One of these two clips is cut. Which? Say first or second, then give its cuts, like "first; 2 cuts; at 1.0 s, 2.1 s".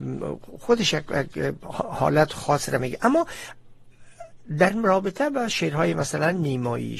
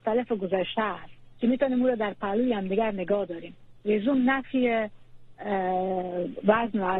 second; 1 cut; at 1.3 s